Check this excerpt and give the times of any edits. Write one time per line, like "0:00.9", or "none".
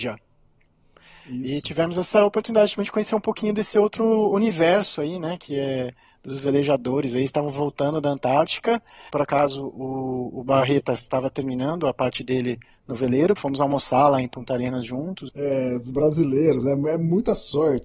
0:09.1
0:13.4
0:15.3